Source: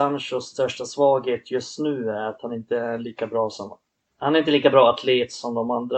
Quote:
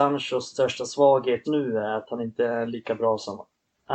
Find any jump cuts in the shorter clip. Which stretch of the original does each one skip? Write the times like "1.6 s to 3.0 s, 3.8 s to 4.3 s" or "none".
1.4 s to 1.8 s